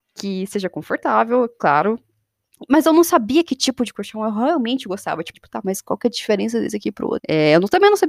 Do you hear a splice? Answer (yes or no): yes